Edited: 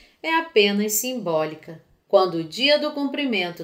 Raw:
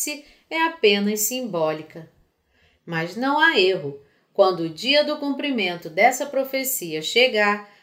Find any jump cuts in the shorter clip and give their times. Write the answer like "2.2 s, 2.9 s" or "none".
2.1 s